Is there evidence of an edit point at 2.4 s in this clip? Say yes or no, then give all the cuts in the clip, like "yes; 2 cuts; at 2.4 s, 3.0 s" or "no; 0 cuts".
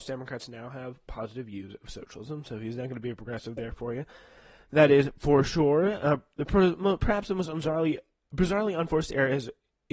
no; 0 cuts